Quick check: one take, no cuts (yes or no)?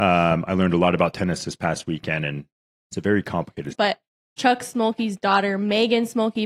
no